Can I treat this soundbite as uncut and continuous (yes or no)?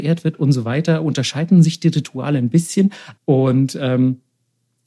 no